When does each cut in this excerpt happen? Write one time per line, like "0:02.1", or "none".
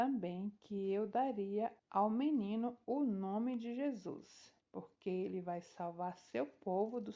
0:01.8
0:04.6